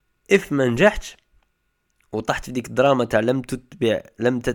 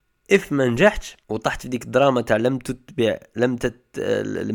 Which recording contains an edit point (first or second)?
second